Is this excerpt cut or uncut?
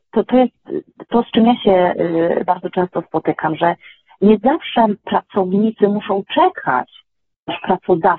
uncut